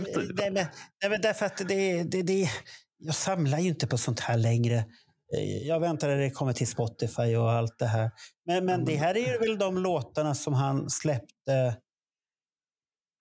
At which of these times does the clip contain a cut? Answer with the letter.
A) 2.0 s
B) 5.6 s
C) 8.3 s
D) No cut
D